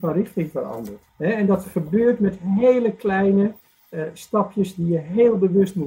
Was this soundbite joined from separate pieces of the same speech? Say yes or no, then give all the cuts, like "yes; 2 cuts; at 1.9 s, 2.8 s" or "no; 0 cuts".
yes; 1 cut; at 1.1 s